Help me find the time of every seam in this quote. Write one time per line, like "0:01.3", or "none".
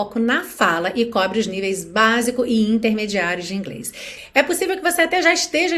none